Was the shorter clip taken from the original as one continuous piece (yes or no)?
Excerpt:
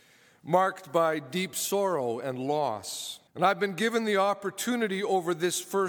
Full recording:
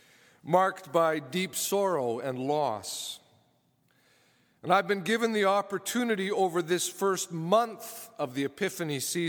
no